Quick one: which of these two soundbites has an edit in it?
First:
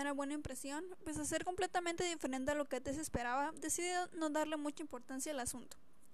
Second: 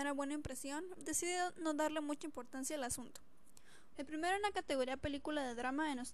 second; 2 cuts; at 1.0 s, 3.9 s

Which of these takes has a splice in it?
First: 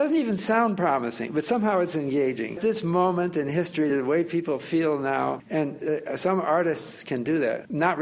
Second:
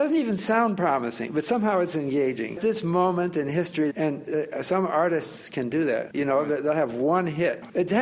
second; 2 cuts; at 3.9 s, 6.1 s

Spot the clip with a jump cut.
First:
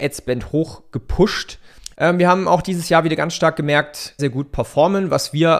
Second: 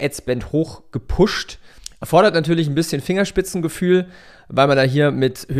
first; 2 cuts; at 1.9 s, 4.2 s

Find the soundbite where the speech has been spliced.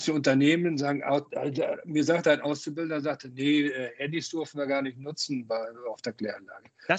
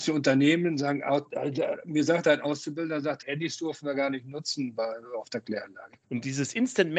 second; 2 cuts; at 3.2 s, 6.0 s

